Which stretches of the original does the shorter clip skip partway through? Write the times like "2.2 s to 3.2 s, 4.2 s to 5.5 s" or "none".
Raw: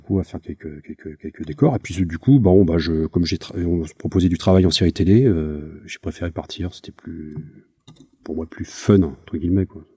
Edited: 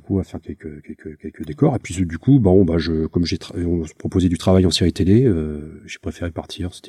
none